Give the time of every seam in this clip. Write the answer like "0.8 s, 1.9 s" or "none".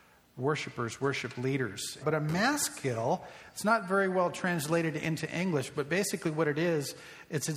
2.0 s

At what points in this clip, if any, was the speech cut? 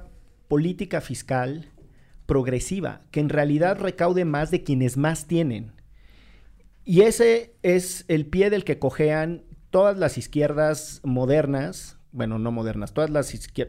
none

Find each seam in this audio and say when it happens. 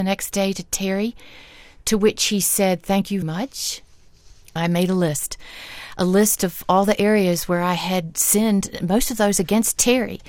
3.2 s, 4.6 s

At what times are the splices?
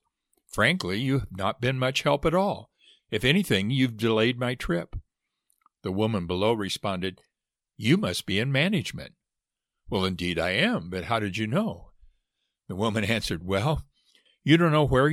none

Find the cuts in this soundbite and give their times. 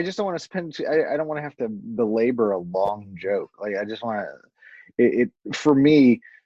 5.4 s

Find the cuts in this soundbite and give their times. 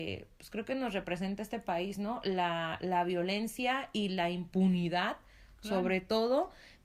none

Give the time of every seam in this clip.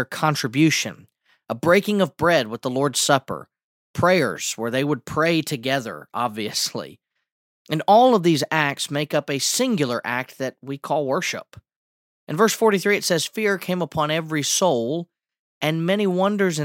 12.2 s

